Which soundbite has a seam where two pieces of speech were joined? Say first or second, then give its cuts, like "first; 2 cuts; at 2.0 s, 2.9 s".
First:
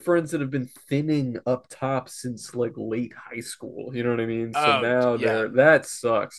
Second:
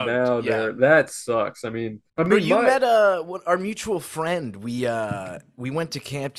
second; 1 cut; at 2.1 s